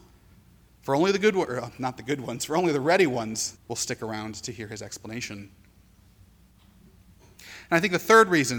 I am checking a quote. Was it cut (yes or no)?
yes